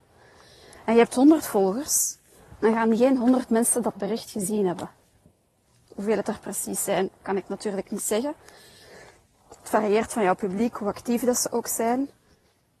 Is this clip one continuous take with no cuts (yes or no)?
yes